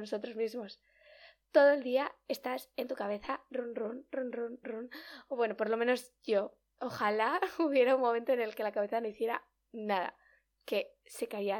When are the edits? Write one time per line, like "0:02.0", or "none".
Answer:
0:04.6